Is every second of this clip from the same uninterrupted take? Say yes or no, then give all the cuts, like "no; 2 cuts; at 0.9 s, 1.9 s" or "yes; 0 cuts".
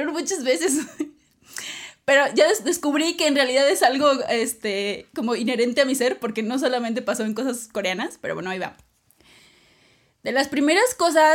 yes; 0 cuts